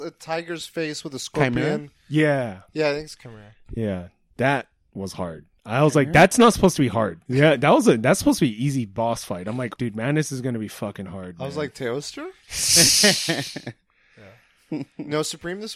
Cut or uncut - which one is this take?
cut